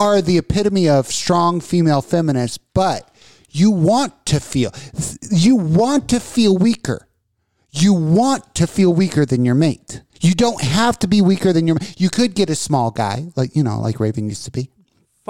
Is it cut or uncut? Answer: cut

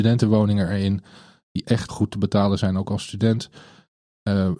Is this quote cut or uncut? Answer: cut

